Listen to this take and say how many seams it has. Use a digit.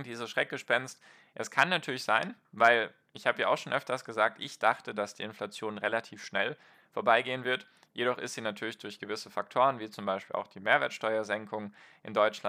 0